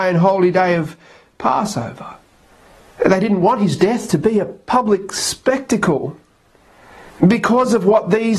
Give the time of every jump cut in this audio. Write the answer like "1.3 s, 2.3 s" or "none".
7.1 s